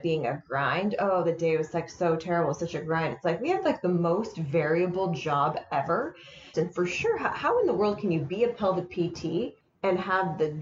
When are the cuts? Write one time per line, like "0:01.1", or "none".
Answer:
0:06.5